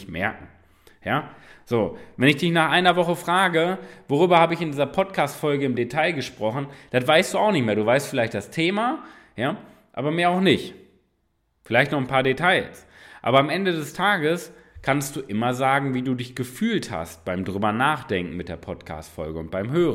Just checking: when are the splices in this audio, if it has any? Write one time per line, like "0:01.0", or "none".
none